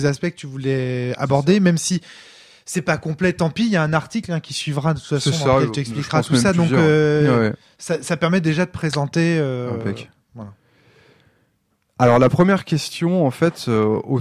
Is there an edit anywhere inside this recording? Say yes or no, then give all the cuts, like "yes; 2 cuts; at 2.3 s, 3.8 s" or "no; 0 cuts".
no; 0 cuts